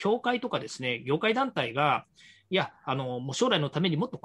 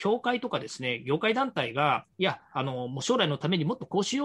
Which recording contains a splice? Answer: second; 1 cut; at 2.1 s

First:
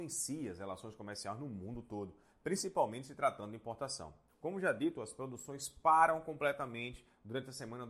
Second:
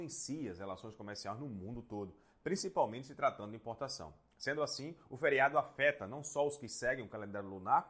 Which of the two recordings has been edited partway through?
first; 1 cut; at 4.3 s

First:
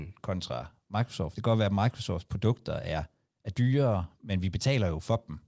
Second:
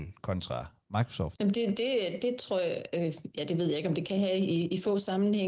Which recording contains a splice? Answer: second; 1 cut; at 1.4 s

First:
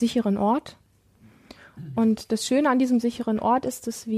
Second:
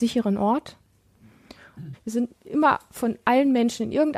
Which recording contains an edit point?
second; 1 cut; at 1.9 s

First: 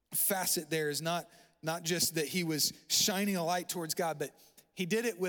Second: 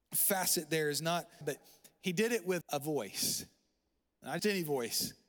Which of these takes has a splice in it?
second; 3 cuts; at 1.4 s, 2.6 s, 4.4 s

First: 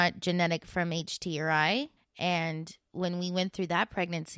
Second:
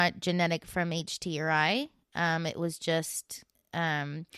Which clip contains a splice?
first; 1 cut; at 2.0 s

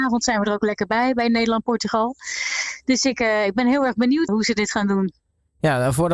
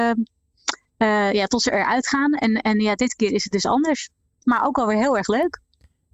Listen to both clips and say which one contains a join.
first; 1 cut; at 4.3 s

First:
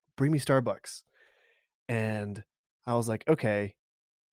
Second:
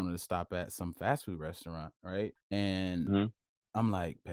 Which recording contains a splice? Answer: second; 1 cut; at 2.4 s

